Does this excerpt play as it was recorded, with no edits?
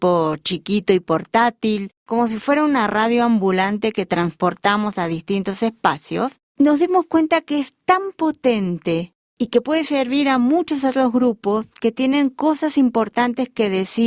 yes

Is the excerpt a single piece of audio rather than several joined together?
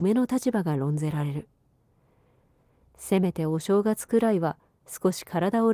yes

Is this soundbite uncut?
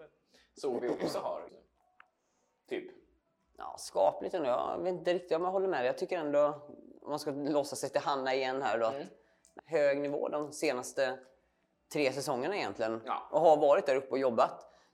no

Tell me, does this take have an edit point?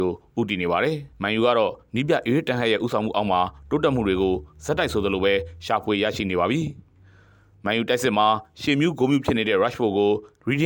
yes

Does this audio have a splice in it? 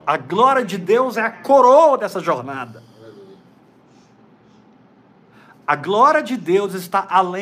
no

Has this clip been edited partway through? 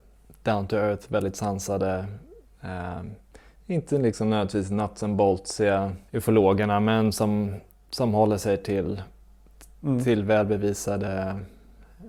yes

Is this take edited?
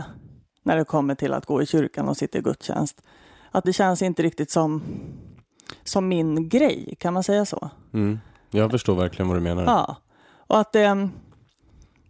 yes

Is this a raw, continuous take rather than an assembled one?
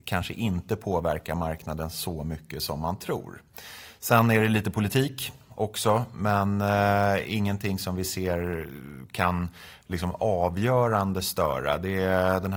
yes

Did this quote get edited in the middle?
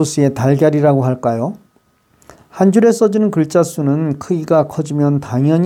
yes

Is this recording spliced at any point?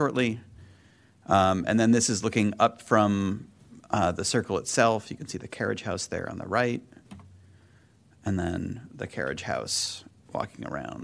no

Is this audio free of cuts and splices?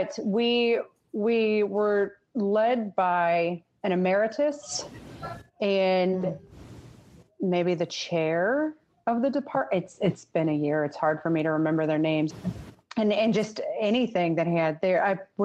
no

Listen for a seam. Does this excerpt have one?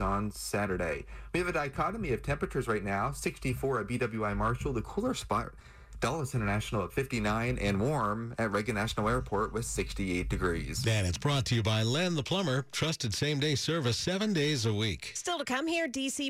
no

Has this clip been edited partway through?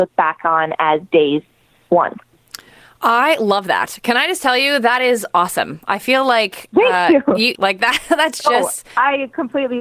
yes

